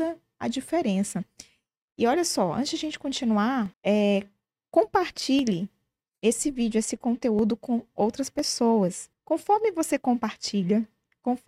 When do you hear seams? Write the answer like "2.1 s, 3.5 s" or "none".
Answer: 3.7 s, 9.1 s